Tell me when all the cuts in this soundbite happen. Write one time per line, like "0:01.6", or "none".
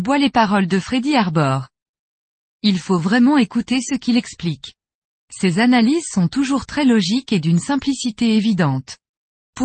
none